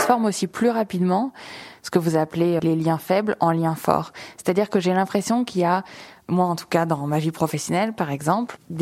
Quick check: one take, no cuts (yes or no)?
no